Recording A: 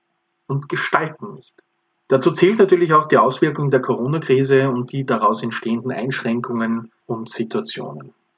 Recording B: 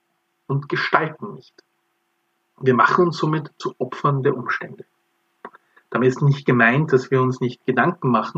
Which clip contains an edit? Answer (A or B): A